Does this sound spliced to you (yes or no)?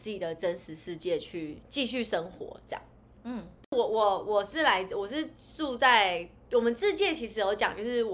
no